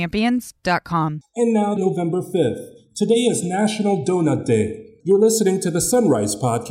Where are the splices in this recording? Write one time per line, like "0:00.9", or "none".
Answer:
0:01.8
0:05.0